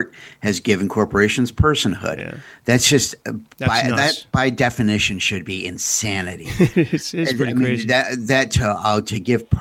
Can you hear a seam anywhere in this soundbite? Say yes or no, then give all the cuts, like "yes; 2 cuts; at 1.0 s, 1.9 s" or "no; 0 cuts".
no; 0 cuts